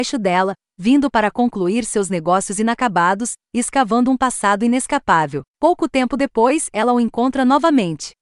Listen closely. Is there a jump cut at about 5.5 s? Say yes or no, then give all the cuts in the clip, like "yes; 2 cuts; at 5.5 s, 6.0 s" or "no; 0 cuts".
yes; 1 cut; at 5.5 s